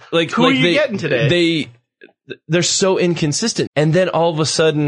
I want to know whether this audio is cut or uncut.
cut